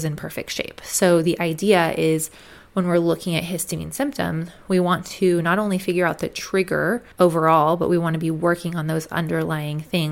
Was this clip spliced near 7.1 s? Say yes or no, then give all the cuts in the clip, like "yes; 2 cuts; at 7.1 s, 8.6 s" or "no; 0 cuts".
yes; 1 cut; at 7.1 s